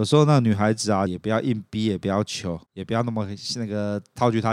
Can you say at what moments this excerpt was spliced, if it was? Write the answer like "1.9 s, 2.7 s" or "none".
1.1 s